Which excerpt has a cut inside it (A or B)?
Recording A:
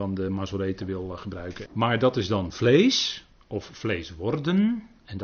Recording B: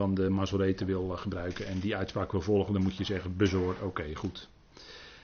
A